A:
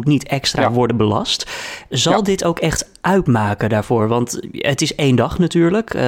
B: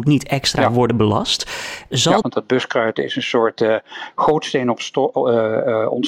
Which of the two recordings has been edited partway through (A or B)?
B